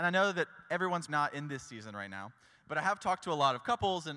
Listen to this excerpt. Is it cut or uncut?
cut